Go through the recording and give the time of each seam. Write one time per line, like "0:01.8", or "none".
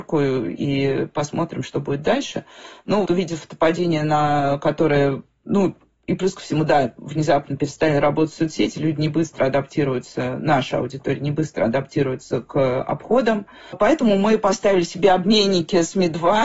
0:03.1